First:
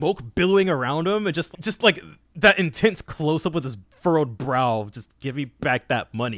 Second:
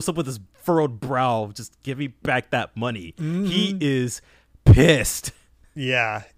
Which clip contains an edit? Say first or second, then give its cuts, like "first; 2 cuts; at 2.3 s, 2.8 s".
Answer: first; 1 cut; at 1.5 s